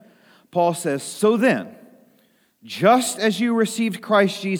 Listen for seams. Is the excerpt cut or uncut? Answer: uncut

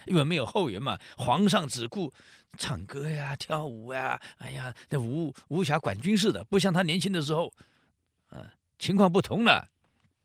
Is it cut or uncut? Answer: uncut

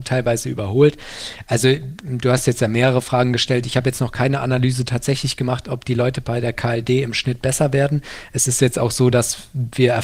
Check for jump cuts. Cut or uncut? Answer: uncut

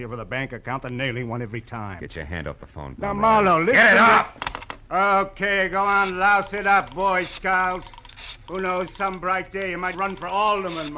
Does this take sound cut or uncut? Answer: cut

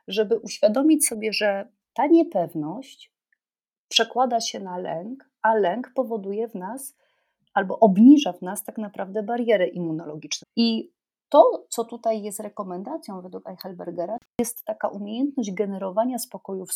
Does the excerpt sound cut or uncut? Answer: cut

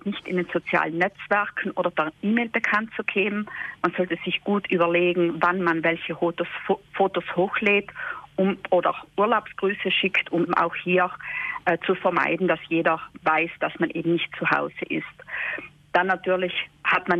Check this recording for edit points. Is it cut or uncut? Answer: cut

